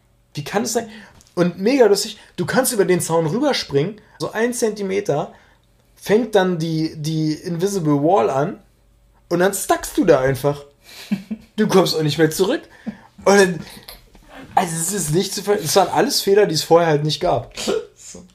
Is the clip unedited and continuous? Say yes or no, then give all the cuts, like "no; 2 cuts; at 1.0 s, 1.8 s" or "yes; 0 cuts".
no; 1 cut; at 4.2 s